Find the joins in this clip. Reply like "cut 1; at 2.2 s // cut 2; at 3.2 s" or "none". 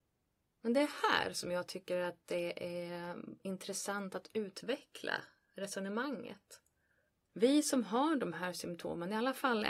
cut 1; at 7.3 s